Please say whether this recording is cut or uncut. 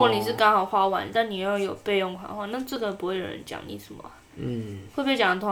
uncut